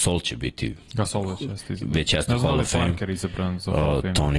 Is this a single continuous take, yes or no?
yes